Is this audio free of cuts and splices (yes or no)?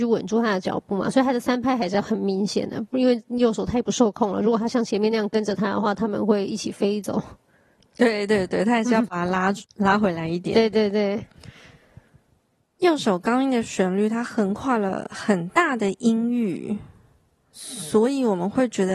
yes